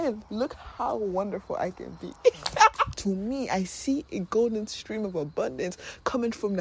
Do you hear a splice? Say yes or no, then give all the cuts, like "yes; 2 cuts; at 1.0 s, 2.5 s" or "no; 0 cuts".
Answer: yes; 1 cut; at 2.9 s